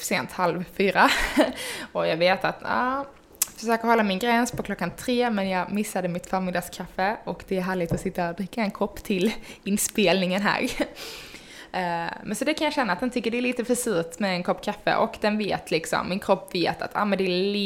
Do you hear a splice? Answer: no; 0 cuts

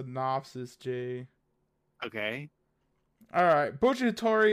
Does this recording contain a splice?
no; 0 cuts

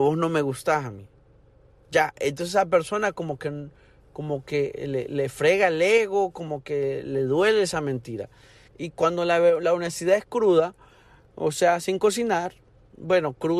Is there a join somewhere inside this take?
yes; 1 cut; at 8.7 s

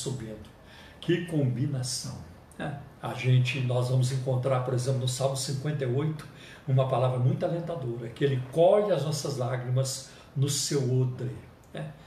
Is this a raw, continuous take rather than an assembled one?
no; 1 cut; at 3.0 s

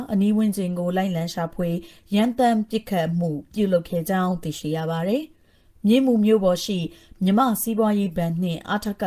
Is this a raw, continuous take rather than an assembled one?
yes; 0 cuts

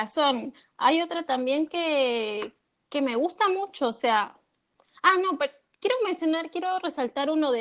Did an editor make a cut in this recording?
no; 0 cuts

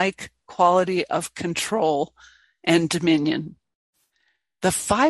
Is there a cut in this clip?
no; 0 cuts

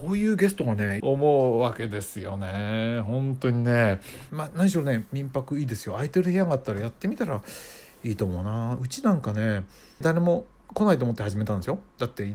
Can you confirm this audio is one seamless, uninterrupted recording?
no; 3 cuts; at 1.0 s, 4.3 s, 10.0 s

